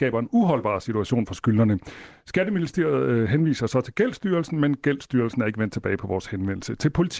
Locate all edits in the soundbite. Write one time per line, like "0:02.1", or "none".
none